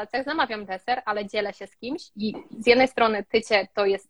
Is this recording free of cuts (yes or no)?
no